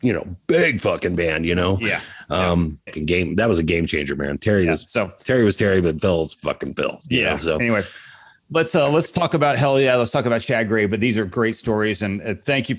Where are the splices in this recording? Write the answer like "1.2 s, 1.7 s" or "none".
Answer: 2.9 s